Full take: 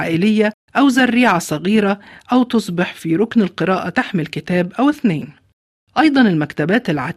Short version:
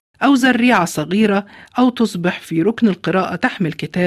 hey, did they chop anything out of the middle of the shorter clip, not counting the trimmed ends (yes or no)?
no